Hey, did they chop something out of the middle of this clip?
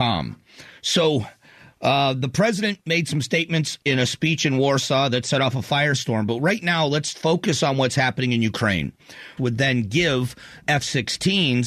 yes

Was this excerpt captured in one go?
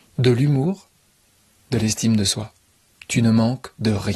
no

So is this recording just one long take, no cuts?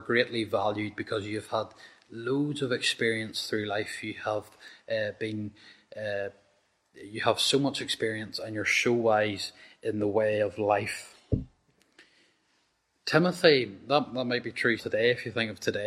no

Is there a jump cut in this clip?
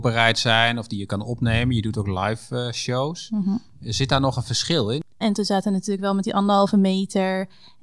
yes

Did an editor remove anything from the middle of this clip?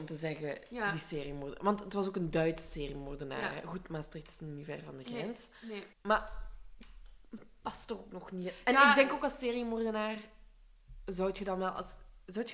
yes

